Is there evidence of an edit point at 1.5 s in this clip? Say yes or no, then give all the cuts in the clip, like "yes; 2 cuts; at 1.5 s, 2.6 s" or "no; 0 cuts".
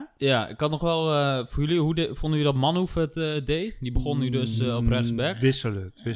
no; 0 cuts